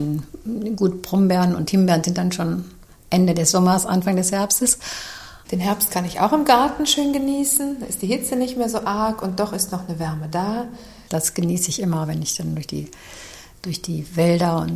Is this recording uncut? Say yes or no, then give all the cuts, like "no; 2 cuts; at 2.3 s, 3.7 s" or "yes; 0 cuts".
no; 2 cuts; at 5.4 s, 11.1 s